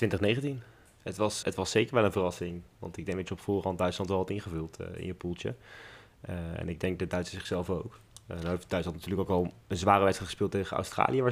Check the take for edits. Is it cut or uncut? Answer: cut